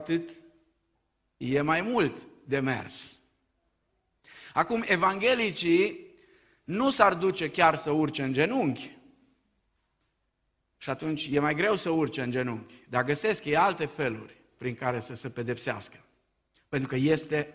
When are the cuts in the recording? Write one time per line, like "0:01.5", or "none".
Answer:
0:10.7